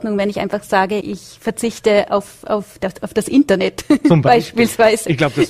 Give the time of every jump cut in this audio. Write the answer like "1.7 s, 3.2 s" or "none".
1.0 s